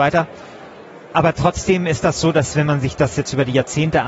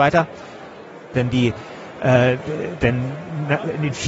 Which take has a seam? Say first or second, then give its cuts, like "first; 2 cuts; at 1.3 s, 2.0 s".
second; 2 cuts; at 1.1 s, 2.8 s